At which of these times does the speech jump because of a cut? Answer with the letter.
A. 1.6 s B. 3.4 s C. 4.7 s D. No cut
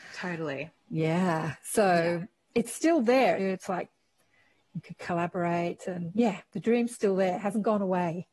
B